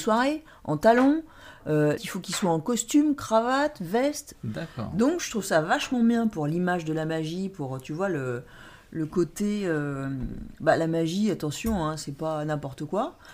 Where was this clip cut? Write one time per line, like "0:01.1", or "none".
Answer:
0:02.0
0:04.3